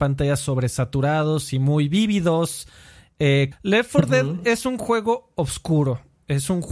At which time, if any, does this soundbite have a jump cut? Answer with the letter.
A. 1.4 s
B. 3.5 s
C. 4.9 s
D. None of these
B